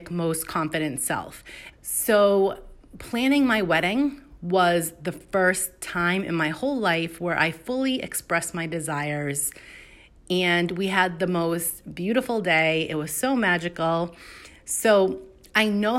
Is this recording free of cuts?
no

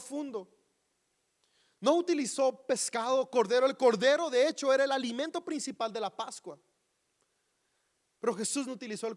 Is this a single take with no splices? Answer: yes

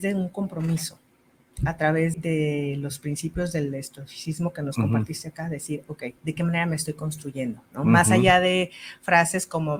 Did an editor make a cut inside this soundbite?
yes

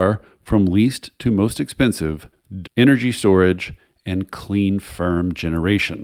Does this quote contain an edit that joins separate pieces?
yes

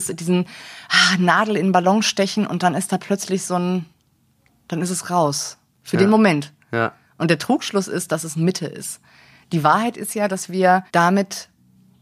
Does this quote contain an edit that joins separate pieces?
yes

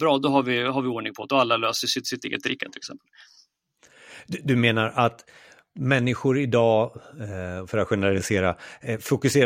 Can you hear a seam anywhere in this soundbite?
no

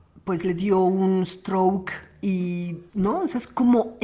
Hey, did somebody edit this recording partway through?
yes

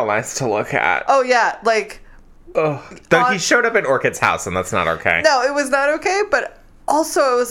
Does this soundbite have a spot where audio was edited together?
no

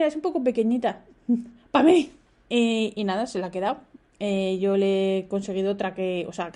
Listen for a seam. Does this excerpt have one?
no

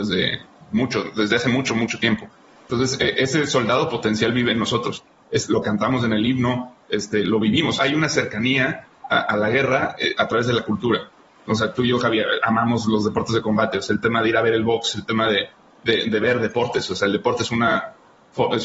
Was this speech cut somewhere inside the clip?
yes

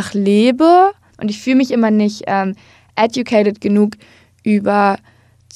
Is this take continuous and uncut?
no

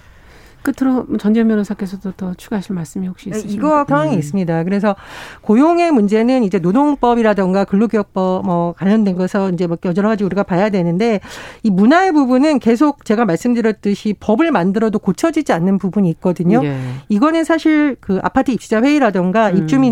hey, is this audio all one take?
no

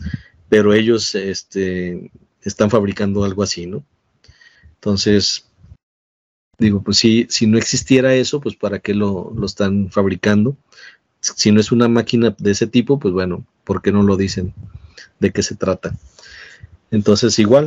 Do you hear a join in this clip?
no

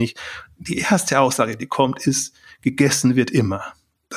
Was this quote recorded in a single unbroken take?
yes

